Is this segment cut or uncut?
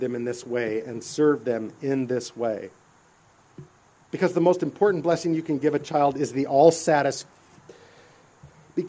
cut